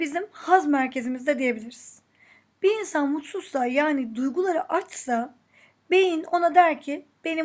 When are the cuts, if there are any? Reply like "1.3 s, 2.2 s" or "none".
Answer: none